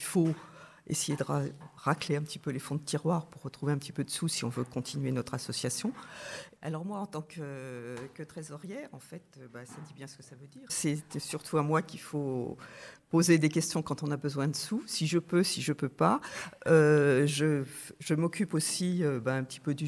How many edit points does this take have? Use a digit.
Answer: 2